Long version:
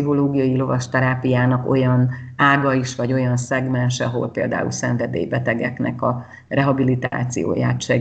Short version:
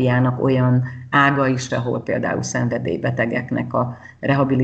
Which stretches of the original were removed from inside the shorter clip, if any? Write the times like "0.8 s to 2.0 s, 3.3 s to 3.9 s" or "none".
3.0 s to 4.0 s